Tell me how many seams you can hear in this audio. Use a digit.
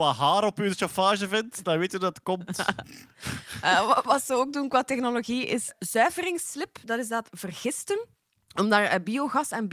0